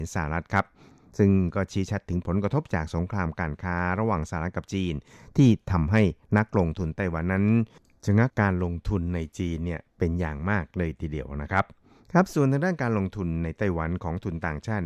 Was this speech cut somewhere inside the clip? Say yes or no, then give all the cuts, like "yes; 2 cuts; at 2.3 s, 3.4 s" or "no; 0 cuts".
yes; 1 cut; at 8.3 s